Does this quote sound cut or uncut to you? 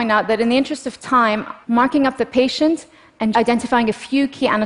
cut